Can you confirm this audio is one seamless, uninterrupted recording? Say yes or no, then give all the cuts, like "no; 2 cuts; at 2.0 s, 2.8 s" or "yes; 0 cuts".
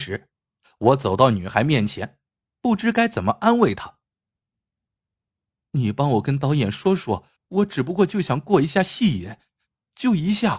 no; 2 cuts; at 4.9 s, 7.4 s